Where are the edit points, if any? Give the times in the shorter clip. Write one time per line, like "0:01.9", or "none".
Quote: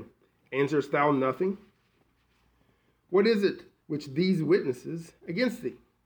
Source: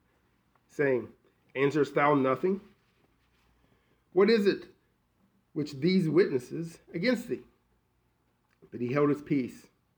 0:03.8